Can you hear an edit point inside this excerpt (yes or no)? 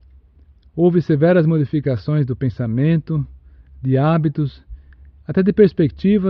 no